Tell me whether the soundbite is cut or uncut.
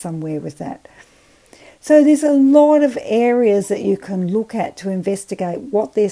uncut